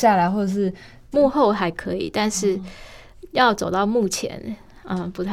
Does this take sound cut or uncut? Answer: cut